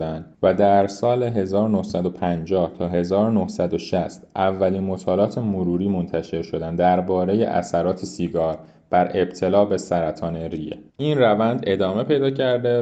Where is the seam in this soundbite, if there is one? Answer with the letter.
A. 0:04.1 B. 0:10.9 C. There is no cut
B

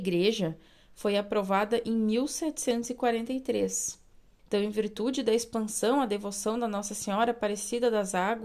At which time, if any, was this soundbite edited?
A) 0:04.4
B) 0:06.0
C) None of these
A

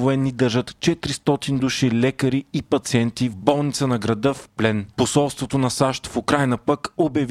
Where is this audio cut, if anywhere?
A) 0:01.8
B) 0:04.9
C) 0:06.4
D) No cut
B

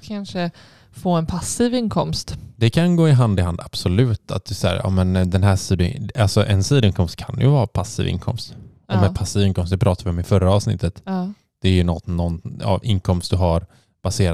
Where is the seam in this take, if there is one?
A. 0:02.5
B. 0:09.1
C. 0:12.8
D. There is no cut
C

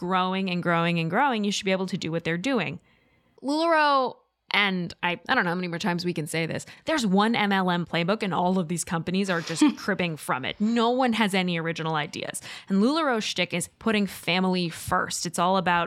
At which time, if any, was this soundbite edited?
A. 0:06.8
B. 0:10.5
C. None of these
C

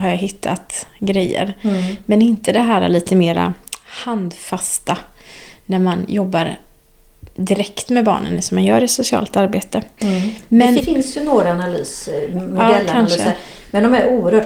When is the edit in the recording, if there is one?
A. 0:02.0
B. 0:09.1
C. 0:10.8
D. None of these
C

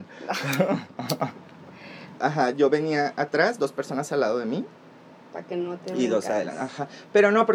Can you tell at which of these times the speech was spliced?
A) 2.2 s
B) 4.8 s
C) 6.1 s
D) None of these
A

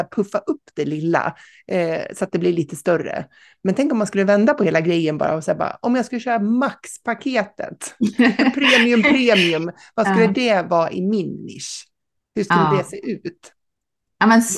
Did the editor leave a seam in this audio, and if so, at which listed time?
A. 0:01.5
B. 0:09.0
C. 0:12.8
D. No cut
D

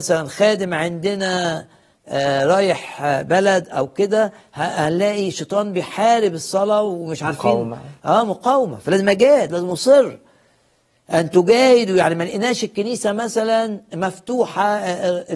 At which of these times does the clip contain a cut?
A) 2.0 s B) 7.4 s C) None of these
C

